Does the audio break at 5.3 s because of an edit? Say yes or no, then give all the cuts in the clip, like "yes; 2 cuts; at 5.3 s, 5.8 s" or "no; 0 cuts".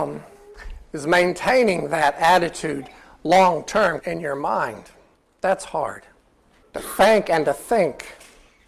no; 2 cuts; at 4.0 s, 6.6 s